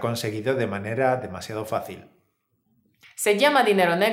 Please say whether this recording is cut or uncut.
cut